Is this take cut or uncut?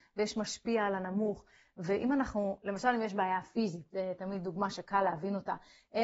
uncut